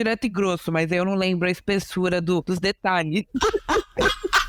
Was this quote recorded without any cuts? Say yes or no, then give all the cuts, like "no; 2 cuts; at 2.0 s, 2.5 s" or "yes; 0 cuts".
yes; 0 cuts